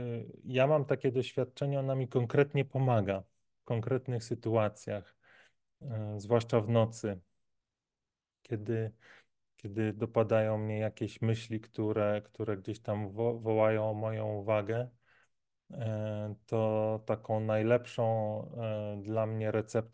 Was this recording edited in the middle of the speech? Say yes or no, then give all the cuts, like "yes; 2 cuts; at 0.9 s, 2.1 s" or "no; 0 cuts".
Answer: no; 0 cuts